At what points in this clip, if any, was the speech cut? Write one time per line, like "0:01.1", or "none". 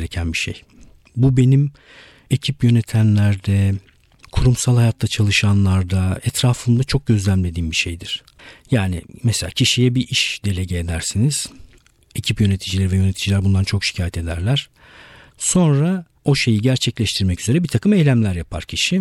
0:04.2